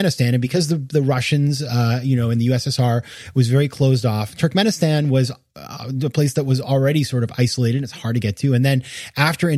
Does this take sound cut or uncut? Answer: uncut